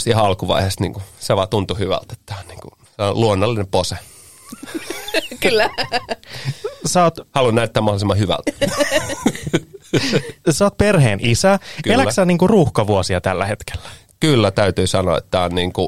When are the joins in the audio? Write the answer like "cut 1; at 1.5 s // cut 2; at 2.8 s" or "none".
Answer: none